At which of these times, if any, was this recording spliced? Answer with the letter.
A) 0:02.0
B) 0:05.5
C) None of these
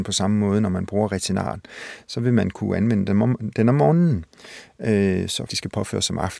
B